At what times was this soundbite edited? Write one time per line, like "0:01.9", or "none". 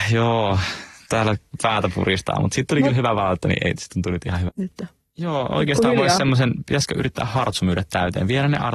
0:04.5